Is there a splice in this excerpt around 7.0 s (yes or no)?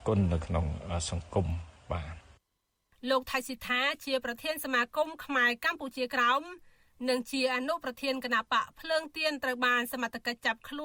no